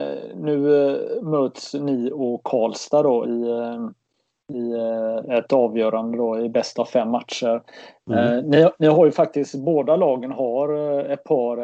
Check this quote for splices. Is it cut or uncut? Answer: cut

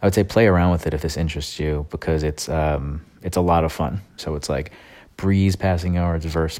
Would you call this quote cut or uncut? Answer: cut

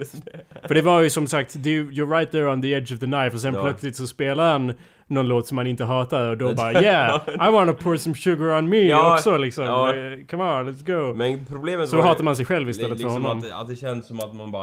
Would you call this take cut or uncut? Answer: uncut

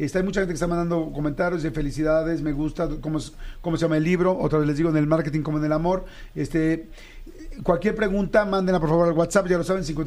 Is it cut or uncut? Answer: uncut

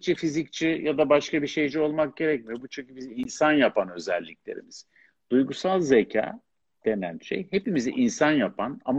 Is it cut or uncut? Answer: uncut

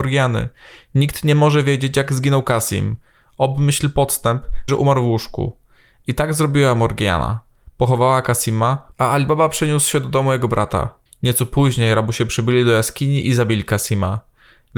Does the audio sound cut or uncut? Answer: cut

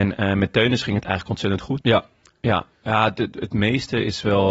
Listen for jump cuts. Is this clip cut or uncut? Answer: cut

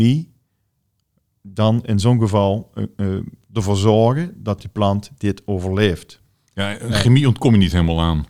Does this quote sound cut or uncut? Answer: uncut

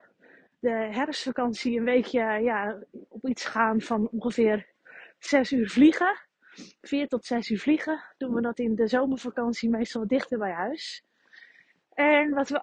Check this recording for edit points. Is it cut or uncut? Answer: uncut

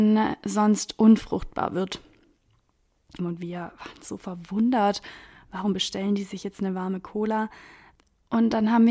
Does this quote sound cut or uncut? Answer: cut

